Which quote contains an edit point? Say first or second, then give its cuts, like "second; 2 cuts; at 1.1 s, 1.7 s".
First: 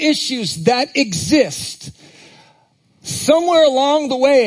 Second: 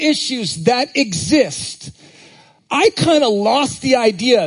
second; 1 cut; at 2.6 s